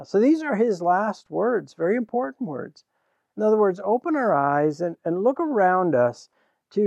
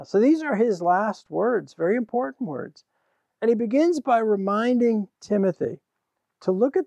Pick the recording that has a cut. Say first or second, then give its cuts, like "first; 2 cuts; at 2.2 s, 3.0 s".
first; 1 cut; at 3.3 s